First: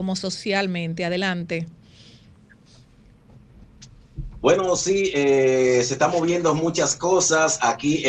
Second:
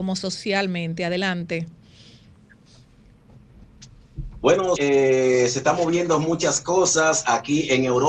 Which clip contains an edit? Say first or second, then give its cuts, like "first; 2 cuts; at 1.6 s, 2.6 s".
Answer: second; 1 cut; at 4.8 s